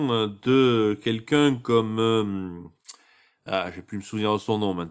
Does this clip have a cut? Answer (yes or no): no